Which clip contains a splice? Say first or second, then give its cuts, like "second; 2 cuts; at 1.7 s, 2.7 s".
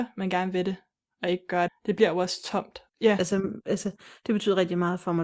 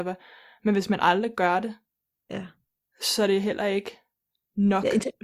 first; 2 cuts; at 1.7 s, 2.9 s